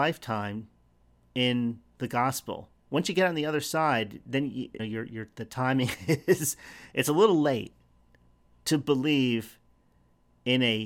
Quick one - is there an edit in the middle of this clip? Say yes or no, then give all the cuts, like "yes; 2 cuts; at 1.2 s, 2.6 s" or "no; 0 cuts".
yes; 1 cut; at 4.8 s